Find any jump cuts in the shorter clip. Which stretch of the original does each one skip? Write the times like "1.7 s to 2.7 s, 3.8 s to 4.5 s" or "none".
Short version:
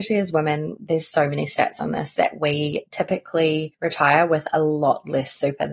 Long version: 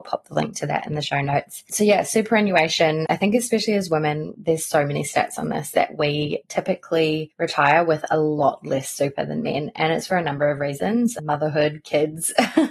none